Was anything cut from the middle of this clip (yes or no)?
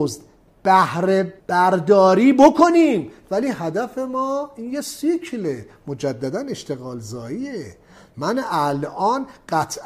yes